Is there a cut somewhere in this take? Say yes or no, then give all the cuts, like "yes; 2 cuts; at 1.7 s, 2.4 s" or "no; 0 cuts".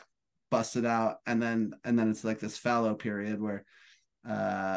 no; 0 cuts